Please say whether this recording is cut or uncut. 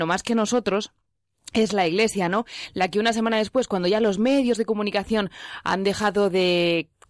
uncut